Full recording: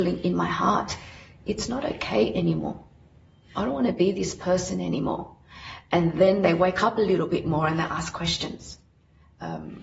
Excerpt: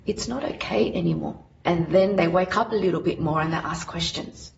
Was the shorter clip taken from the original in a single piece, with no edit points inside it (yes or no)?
no